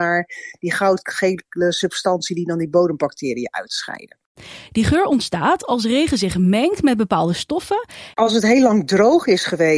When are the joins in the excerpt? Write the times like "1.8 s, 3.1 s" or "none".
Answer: 8.1 s